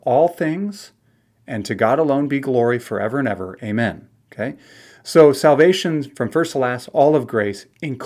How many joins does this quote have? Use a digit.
0